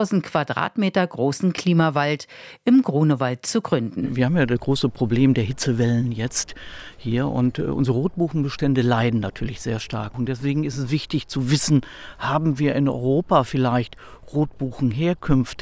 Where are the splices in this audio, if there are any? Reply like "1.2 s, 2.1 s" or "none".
none